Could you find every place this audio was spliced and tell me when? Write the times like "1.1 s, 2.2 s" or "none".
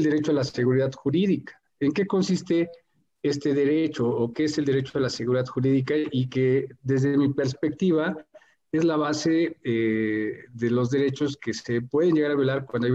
none